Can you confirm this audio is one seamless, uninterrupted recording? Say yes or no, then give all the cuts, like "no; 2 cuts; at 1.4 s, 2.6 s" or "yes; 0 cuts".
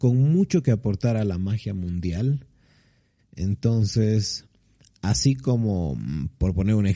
no; 1 cut; at 3.2 s